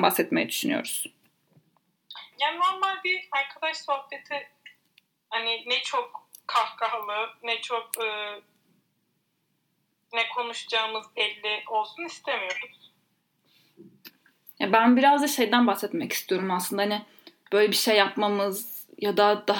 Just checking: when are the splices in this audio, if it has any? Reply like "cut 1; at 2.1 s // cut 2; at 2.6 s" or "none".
cut 1; at 2.3 s